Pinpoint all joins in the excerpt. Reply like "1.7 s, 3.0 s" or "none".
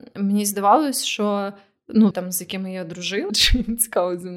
2.1 s, 3.3 s